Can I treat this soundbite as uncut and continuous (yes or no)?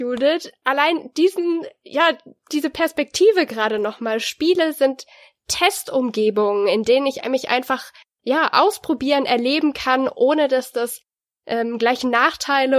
yes